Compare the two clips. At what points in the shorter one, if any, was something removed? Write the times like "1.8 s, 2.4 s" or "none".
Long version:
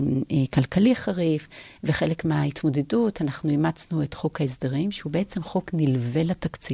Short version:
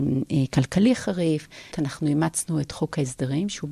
1.7 s